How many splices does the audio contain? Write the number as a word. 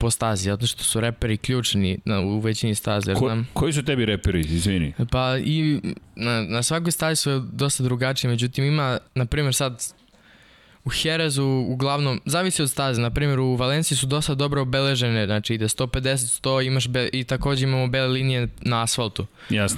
one